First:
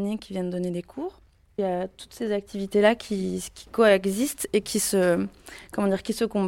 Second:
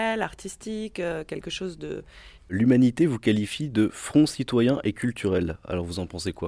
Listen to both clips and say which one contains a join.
second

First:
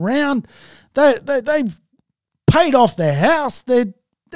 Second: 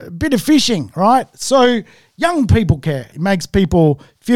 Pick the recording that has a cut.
second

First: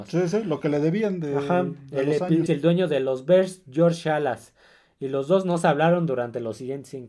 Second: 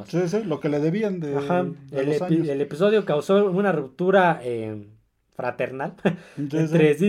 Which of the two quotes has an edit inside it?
first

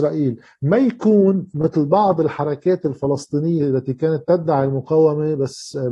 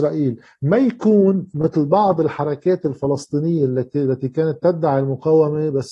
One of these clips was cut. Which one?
first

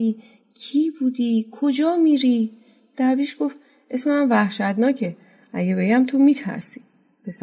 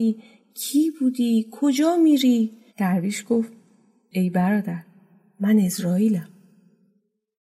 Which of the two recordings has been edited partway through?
second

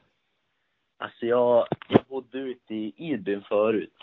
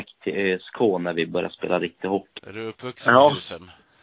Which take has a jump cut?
second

